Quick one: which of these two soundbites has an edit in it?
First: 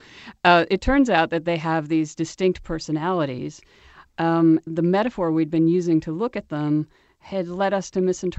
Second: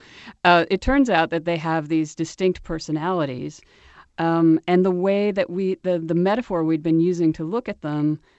first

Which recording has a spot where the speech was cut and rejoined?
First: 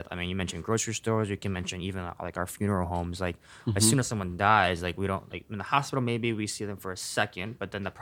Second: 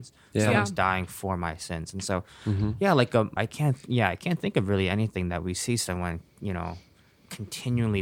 second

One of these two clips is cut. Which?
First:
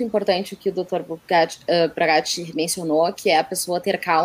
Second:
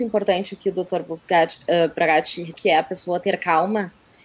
second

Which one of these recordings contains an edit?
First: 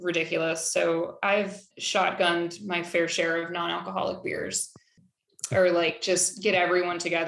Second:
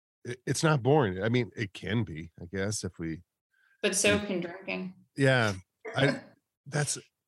first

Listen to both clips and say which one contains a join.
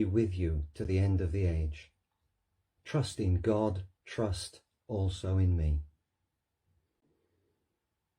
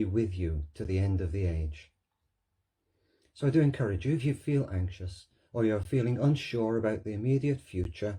first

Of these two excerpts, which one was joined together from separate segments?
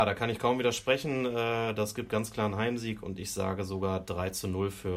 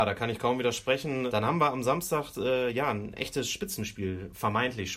second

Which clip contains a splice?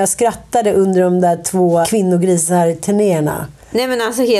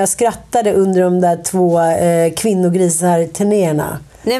first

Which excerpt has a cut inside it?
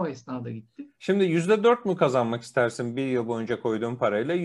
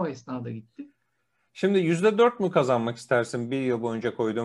first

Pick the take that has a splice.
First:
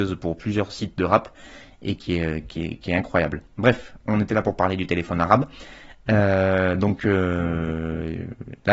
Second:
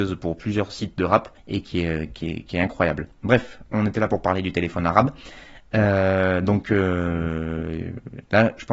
second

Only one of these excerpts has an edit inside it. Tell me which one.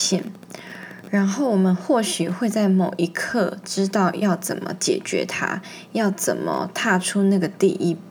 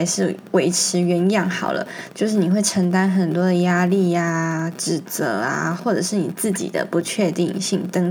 second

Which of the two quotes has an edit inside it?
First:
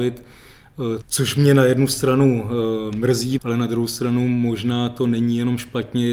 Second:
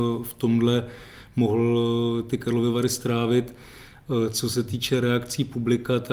first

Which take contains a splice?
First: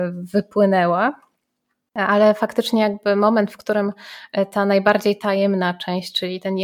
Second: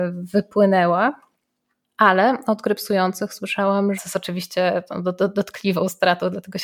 second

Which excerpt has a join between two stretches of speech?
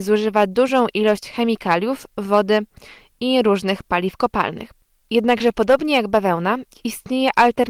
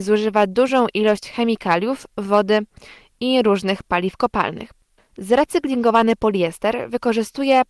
second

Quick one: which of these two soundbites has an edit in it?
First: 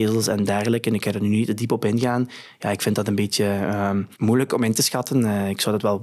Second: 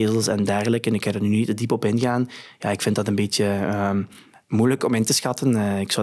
first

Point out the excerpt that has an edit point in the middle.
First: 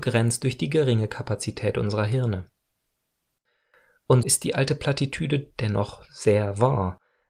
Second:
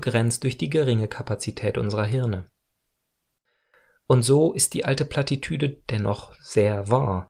first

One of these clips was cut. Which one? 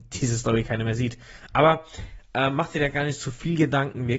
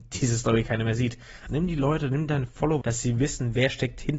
second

